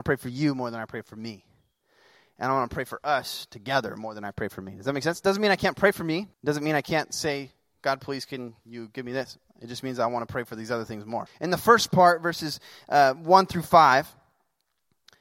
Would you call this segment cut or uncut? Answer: cut